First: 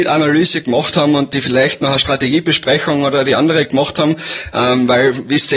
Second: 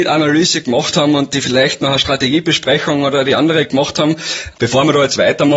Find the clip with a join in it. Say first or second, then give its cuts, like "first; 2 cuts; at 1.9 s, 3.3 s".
second; 1 cut; at 4.5 s